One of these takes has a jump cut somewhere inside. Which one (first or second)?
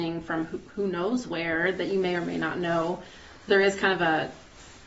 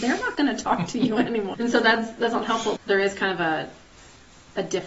second